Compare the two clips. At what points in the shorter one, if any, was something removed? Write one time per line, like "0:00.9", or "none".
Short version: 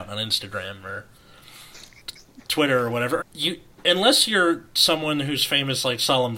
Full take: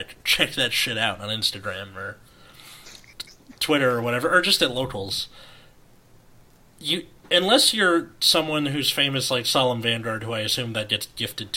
0:03.2